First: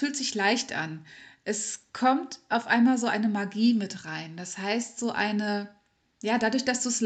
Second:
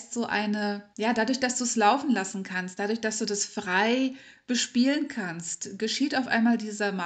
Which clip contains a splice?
second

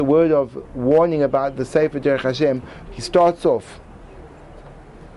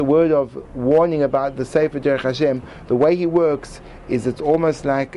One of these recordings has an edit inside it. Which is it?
first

